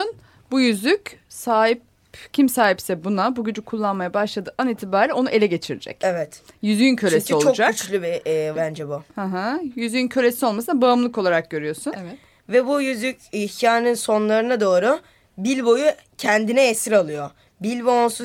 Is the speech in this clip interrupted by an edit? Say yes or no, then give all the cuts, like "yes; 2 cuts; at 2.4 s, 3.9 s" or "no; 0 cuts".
yes; 2 cuts; at 8.5 s, 11.9 s